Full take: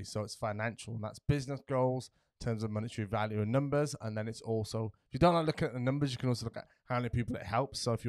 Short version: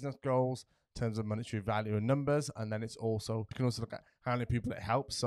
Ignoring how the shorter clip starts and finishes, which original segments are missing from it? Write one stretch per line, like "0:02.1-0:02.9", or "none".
0:05.0-0:06.1

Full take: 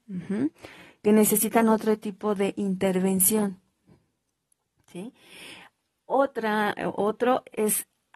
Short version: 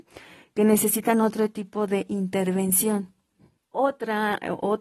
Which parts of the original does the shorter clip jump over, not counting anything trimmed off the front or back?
0:04.1-0:05.9

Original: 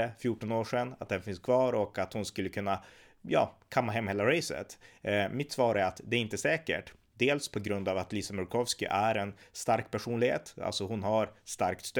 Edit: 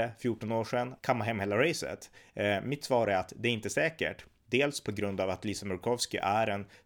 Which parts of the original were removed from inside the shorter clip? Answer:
0:01.0-0:03.7

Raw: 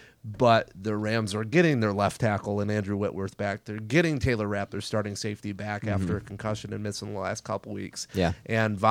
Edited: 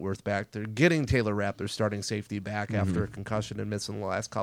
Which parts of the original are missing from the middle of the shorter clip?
none

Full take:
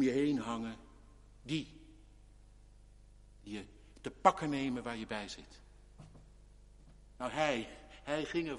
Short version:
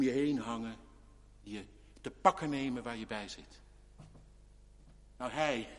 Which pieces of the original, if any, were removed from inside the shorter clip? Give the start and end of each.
0:01.4-0:03.4

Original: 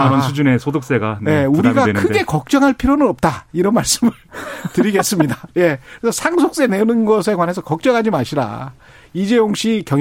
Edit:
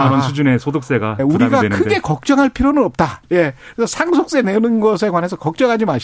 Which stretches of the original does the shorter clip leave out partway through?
0:01.2-0:01.4
0:03.5-0:05.5

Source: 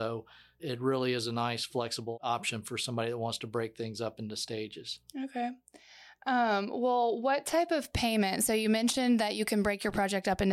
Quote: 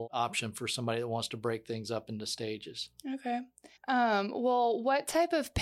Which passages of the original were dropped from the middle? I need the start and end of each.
0:05.9-0:06.1

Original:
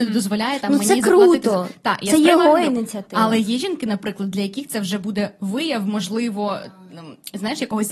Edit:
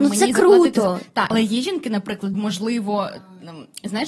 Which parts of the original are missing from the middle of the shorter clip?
0:02.0-0:03.3
0:04.3-0:05.8

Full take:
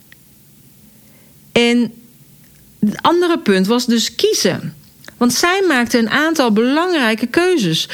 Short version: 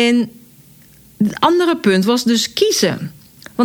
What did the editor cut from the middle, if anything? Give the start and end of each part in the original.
none

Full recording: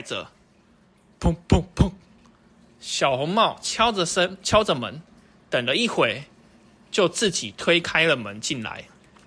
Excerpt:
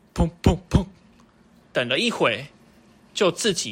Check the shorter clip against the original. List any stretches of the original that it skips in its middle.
0:02.7-0:05.4

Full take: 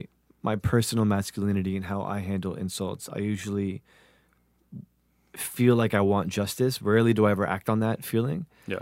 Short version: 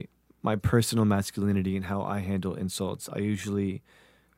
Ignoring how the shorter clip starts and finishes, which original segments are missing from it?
none

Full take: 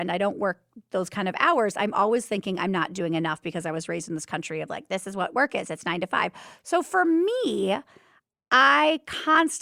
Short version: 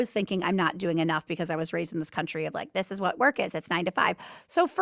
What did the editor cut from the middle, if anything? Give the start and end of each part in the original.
none

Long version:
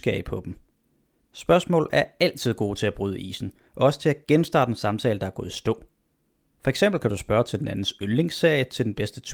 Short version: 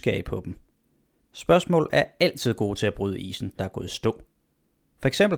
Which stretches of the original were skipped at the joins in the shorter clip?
0:03.6-0:05.2

